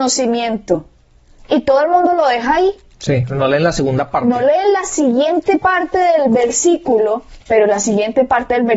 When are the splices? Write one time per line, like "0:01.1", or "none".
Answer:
0:07.4

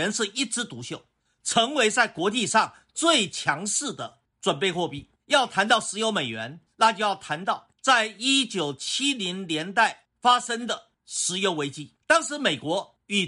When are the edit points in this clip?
0:05.2

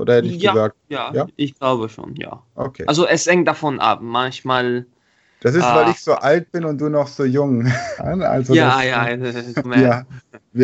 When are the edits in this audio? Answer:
0:08.0
0:09.6

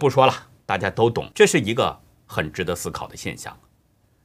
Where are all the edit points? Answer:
0:01.3

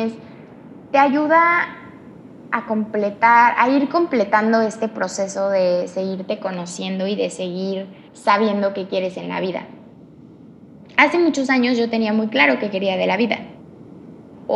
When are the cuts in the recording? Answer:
0:08.1

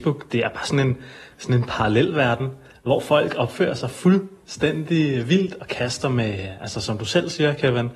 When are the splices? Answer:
none

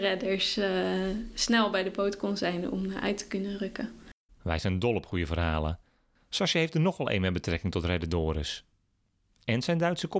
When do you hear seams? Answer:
0:04.3

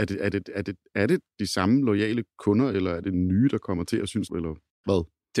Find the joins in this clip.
0:04.3

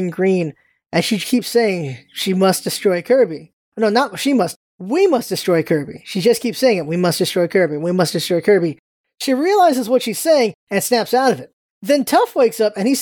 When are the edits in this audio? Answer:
none

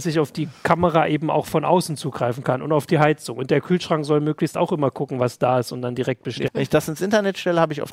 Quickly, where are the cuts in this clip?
0:06.5

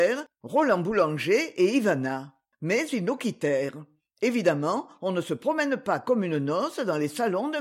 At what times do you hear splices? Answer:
0:02.5

